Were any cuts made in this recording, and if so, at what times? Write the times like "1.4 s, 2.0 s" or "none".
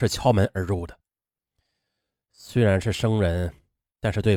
none